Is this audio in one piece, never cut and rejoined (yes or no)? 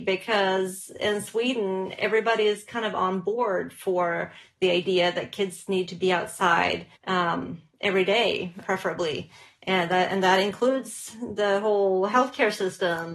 no